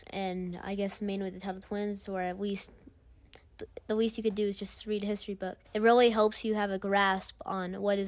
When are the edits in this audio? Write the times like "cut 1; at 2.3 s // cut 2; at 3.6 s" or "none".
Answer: cut 1; at 5.7 s